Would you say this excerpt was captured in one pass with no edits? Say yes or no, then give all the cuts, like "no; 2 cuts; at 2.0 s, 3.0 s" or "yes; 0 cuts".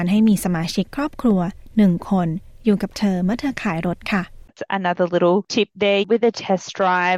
no; 1 cut; at 6.0 s